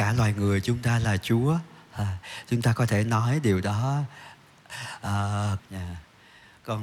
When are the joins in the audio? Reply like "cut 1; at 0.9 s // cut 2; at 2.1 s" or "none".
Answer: cut 1; at 5.6 s